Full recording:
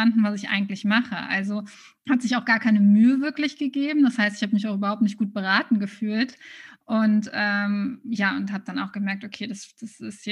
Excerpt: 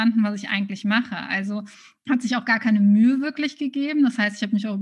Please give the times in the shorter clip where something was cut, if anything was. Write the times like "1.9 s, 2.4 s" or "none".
none